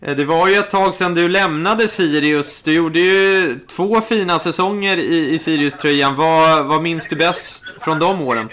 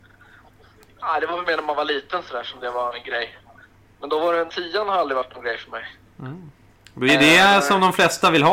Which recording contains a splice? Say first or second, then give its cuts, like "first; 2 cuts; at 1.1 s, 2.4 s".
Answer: second; 1 cut; at 4.5 s